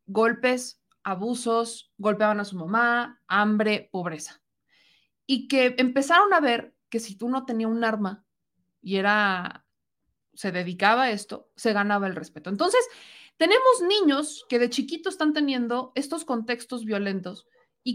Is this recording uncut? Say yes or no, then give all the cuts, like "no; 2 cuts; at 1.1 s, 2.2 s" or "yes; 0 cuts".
yes; 0 cuts